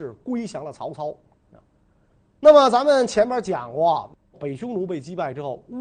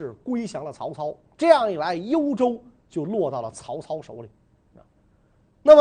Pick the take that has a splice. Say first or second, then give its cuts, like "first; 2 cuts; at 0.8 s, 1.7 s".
first; 2 cuts; at 1.3 s, 4.3 s